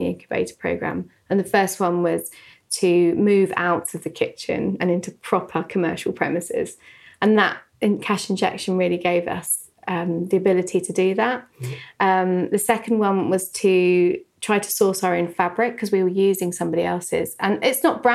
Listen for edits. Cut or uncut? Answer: uncut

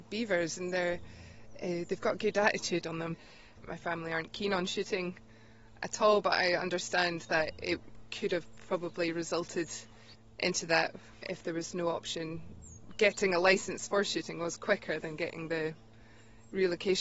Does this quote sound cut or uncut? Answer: uncut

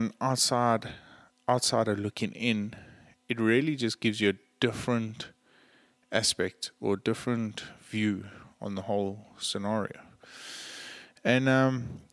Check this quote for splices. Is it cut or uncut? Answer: uncut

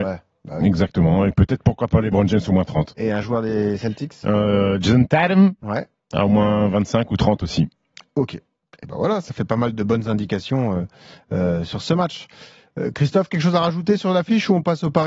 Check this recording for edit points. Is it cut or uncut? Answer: uncut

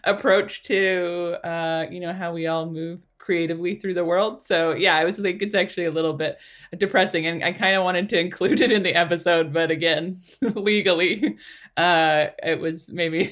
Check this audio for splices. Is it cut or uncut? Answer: uncut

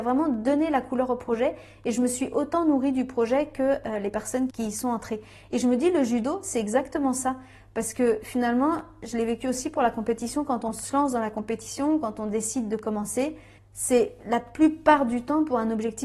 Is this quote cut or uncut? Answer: cut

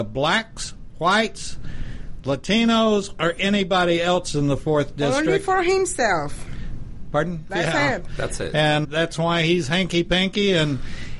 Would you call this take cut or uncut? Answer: cut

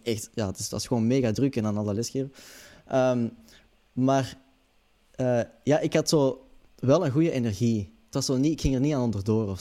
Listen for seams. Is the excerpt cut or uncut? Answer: uncut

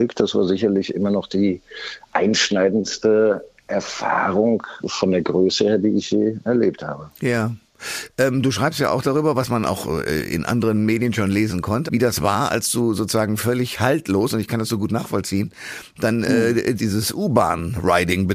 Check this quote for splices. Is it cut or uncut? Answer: cut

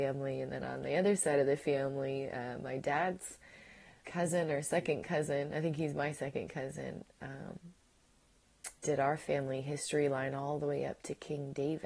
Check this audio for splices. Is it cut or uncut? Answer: cut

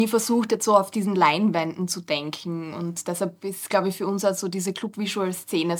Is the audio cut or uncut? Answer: uncut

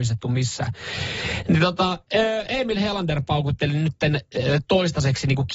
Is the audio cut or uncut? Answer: uncut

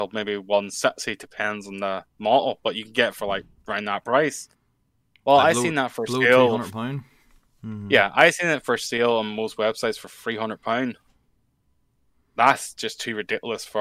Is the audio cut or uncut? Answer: uncut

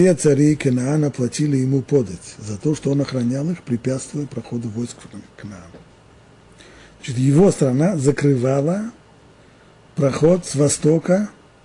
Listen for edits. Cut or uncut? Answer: uncut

